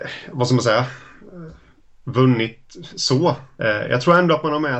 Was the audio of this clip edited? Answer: yes; 1 cut; at 3.6 s

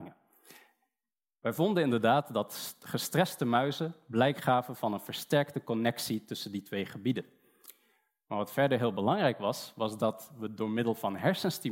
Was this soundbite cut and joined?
no; 0 cuts

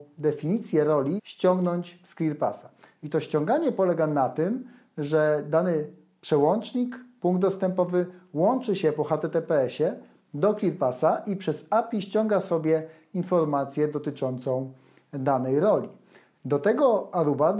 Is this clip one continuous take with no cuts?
no; 2 cuts; at 1.2 s, 16.3 s

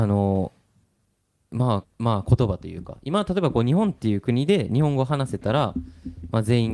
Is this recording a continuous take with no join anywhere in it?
no; 1 cut; at 1.8 s

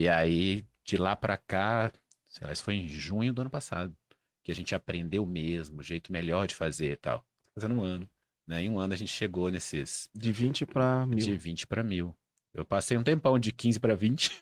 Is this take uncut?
yes; 0 cuts

